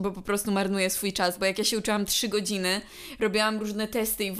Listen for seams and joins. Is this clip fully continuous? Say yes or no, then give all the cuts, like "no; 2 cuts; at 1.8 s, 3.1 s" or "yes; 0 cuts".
yes; 0 cuts